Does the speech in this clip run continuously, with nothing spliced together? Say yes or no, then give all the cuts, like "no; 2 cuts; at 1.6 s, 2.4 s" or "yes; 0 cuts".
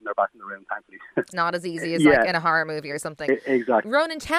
no; 2 cuts; at 1.3 s, 3.3 s